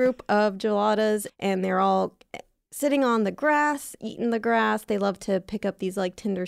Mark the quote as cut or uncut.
cut